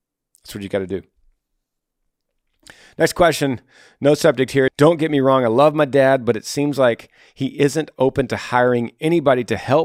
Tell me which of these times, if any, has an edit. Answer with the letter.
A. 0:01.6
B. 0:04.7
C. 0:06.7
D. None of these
B